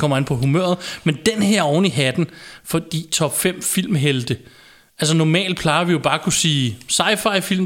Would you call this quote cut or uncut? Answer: uncut